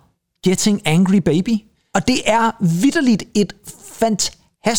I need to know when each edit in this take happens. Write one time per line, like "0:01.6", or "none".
none